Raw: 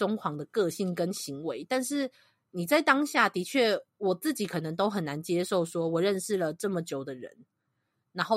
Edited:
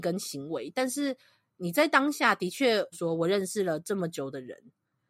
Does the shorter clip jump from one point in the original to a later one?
yes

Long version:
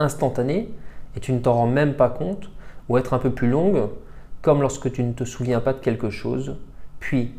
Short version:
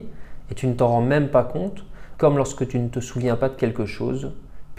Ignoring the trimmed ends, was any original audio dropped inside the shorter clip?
yes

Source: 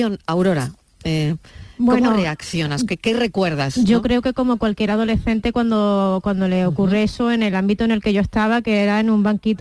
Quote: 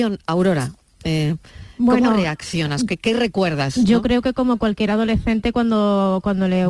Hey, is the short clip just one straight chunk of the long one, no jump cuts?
yes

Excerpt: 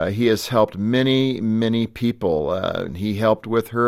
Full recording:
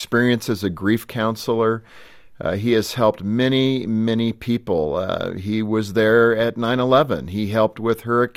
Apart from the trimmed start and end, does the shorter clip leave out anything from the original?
yes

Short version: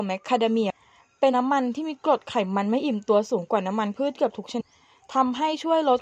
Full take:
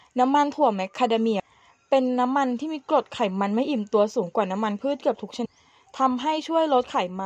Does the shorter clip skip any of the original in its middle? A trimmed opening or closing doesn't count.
yes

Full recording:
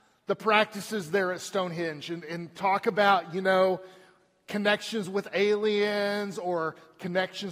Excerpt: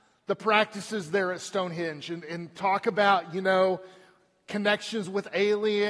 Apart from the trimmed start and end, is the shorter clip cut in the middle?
no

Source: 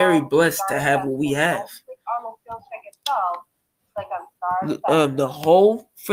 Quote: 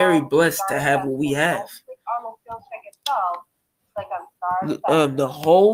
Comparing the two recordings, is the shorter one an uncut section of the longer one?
yes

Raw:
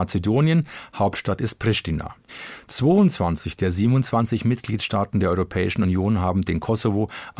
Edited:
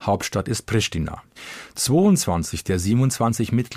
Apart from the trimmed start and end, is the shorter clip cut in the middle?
no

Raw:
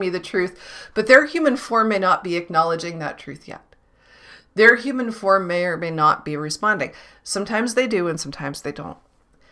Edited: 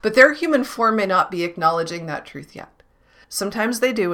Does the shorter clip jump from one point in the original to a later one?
yes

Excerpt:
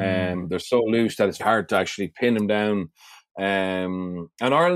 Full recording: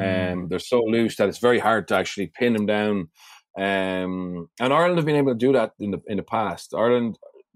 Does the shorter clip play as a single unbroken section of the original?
no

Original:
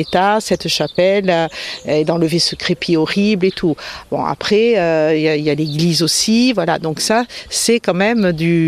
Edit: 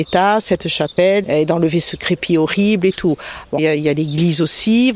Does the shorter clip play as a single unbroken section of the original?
no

